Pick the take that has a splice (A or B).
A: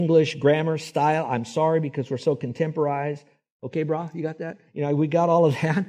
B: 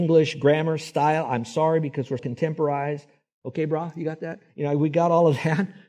B